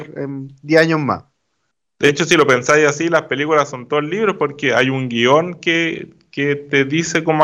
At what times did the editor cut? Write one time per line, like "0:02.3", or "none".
none